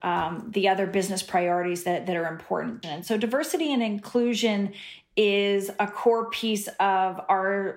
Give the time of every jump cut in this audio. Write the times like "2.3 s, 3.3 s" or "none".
2.8 s